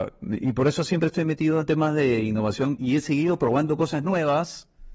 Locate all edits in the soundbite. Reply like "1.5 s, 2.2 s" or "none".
2.8 s